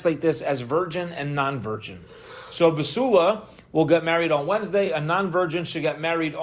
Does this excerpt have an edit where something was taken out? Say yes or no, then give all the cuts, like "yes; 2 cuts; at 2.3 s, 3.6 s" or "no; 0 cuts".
no; 0 cuts